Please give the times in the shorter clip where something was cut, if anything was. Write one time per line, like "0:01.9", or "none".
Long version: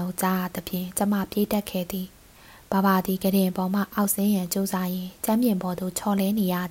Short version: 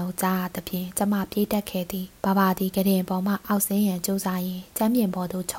0:02.2